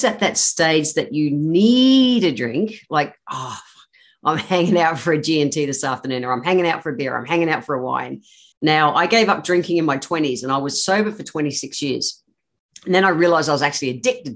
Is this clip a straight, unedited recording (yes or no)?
no